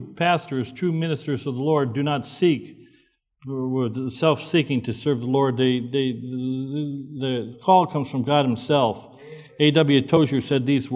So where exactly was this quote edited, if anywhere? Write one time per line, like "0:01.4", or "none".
0:07.5